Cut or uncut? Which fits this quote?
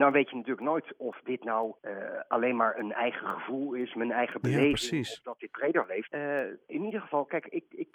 cut